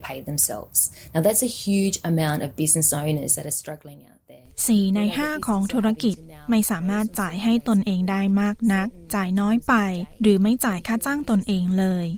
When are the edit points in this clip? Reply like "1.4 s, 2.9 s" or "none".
none